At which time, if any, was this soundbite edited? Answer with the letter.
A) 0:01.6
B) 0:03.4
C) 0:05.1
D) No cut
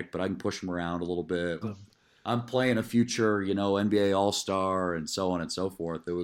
A